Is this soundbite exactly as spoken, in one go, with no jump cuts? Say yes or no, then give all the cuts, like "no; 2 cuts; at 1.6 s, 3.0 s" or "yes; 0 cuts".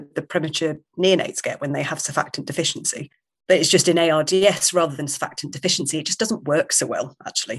yes; 0 cuts